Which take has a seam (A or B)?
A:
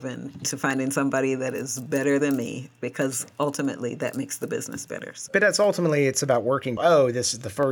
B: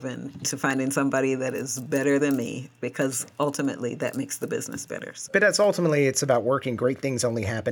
A